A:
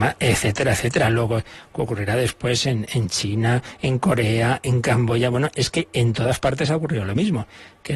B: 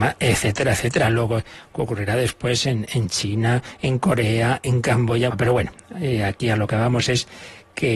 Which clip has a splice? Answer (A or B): B